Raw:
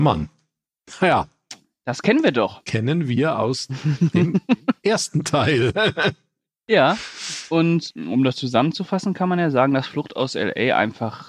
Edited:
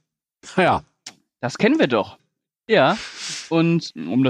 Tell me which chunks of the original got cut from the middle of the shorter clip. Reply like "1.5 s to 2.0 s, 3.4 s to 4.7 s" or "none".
2.6 s to 6.2 s